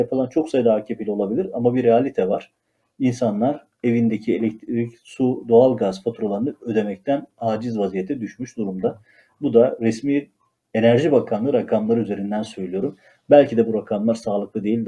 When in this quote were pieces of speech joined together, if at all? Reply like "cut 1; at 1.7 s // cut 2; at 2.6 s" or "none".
none